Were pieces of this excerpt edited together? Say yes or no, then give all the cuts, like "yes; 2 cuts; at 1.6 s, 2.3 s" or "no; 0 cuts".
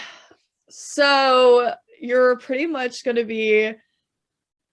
yes; 1 cut; at 1.9 s